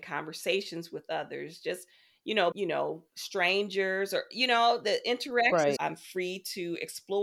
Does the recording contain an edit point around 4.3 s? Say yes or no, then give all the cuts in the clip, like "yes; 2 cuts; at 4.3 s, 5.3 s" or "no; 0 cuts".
no; 2 cuts; at 2.5 s, 5.8 s